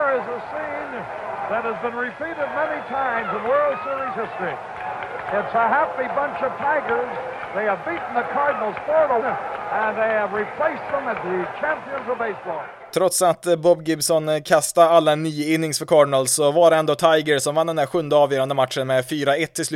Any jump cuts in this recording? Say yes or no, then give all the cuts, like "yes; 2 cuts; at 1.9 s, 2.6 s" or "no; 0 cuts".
yes; 1 cut; at 9.2 s